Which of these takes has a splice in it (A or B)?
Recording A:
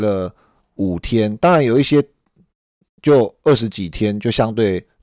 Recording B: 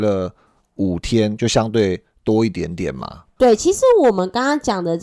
B